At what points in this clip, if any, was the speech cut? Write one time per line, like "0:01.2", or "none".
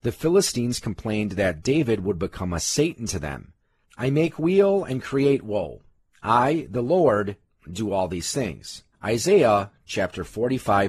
0:03.8
0:08.9